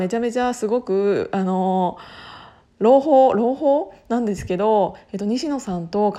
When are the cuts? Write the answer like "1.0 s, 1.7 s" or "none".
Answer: none